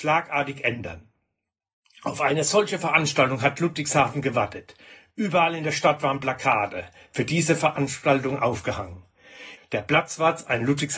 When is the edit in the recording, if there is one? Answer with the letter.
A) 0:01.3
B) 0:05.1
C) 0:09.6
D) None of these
C